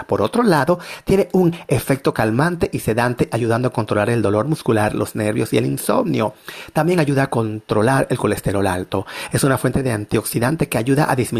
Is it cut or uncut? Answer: uncut